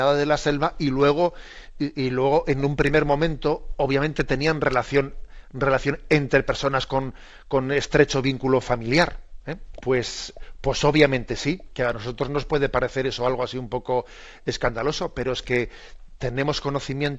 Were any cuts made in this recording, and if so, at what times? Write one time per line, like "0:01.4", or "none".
0:09.8